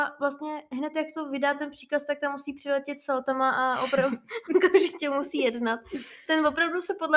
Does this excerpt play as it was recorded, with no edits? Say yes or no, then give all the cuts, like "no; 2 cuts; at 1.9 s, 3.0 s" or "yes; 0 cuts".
yes; 0 cuts